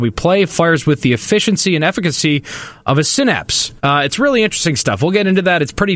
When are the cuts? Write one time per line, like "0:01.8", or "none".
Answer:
0:03.8